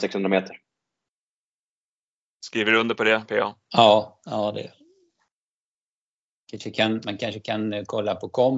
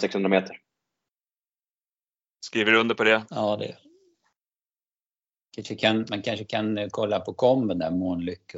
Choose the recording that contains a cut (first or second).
second